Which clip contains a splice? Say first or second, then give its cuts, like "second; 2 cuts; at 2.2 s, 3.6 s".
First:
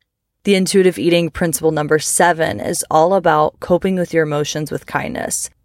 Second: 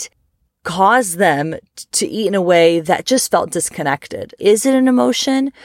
second; 1 cut; at 4.4 s